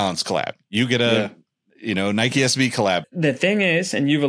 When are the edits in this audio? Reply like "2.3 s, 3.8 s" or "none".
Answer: 3.0 s